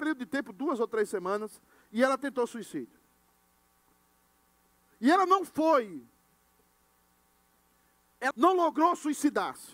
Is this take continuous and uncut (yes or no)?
no